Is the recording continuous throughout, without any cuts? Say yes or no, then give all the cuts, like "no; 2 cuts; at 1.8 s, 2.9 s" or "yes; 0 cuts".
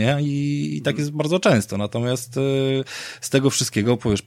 yes; 0 cuts